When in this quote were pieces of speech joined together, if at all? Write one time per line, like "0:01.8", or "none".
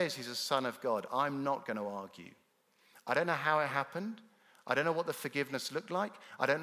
none